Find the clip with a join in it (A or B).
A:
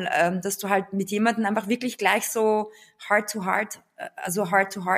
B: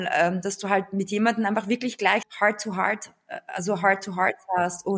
B